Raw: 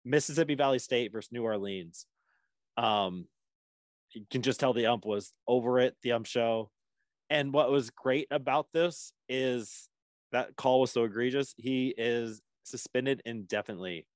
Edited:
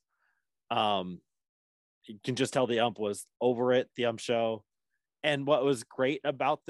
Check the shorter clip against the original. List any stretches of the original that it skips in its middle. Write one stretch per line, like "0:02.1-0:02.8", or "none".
none